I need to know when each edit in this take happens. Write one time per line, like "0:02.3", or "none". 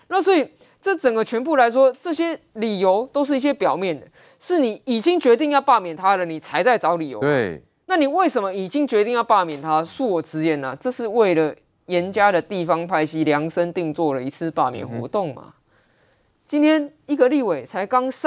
none